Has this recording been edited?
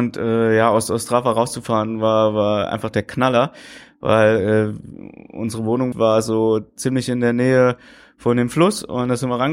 yes; 1 cut; at 5.9 s

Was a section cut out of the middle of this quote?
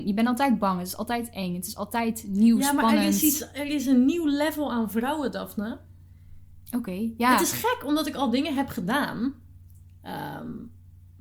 no; 0 cuts

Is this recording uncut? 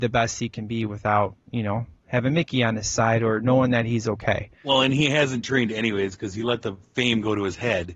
yes; 0 cuts

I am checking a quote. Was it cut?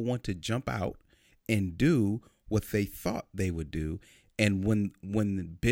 no; 0 cuts

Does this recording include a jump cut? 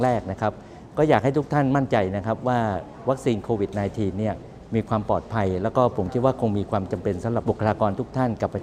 yes; 1 cut; at 7.4 s

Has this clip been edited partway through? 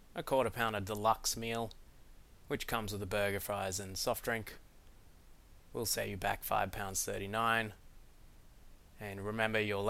yes; 1 cut; at 5.6 s

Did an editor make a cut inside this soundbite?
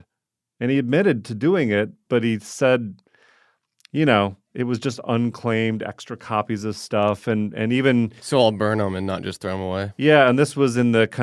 no; 0 cuts

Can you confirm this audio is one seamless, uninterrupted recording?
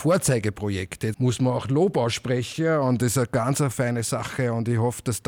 no; 2 cuts; at 1.1 s, 3.7 s

